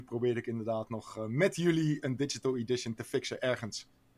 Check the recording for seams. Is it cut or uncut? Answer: uncut